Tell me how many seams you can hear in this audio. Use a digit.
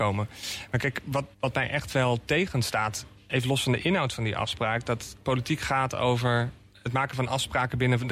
1